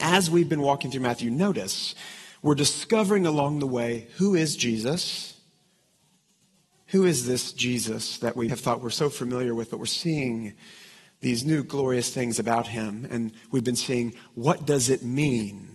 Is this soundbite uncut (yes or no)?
no